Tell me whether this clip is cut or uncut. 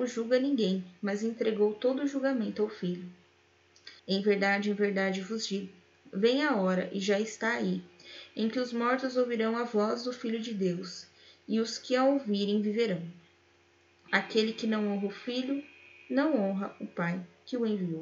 cut